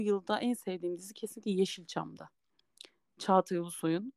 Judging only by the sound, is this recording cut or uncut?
uncut